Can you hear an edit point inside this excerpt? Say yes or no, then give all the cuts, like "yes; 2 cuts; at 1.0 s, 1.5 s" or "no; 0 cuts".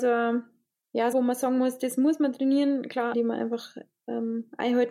yes; 2 cuts; at 1.1 s, 3.1 s